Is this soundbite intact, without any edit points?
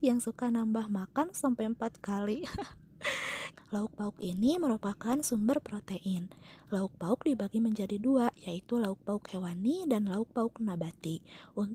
no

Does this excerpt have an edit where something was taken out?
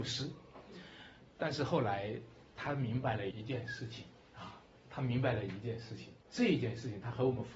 yes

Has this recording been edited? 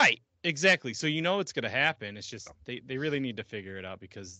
no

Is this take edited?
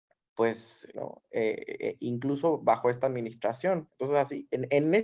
yes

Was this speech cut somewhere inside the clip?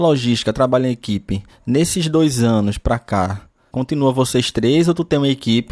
no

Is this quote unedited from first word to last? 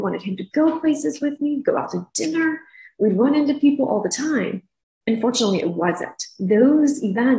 no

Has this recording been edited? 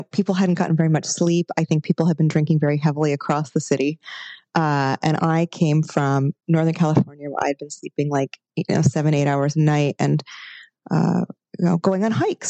no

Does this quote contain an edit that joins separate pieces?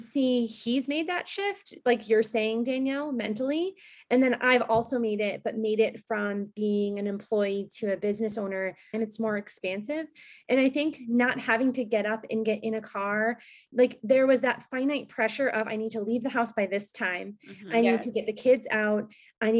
yes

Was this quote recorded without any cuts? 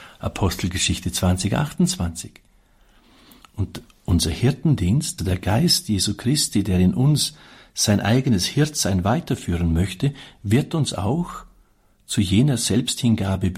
no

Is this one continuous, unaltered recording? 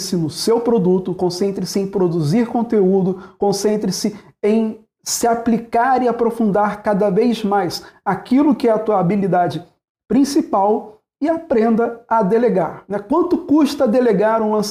yes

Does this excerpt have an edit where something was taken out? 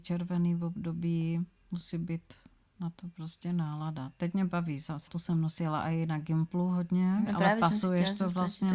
yes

